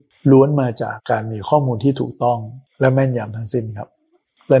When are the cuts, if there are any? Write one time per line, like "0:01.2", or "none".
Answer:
0:01.0